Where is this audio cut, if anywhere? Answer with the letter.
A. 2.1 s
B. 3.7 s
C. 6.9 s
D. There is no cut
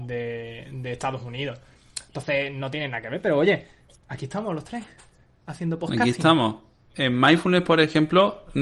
C